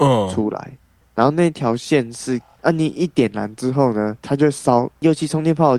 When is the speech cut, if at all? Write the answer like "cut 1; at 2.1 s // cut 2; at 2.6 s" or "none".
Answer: cut 1; at 1.0 s // cut 2; at 2.6 s